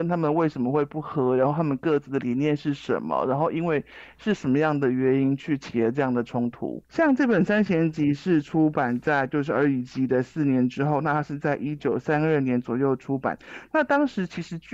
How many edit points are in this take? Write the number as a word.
zero